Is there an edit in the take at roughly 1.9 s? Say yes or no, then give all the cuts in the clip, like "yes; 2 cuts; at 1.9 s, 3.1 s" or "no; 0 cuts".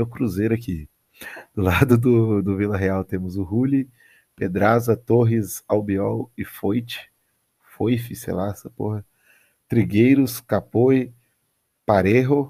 no; 0 cuts